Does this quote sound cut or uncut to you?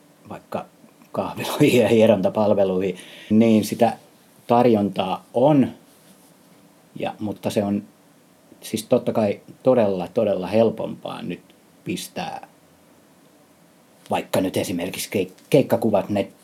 cut